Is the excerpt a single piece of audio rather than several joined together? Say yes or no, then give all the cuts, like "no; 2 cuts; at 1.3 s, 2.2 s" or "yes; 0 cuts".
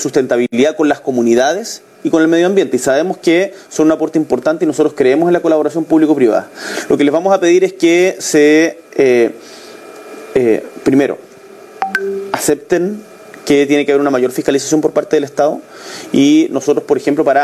yes; 0 cuts